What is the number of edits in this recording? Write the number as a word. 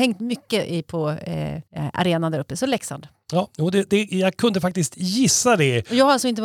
one